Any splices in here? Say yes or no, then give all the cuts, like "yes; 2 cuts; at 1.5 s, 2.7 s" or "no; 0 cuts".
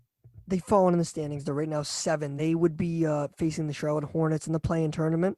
no; 0 cuts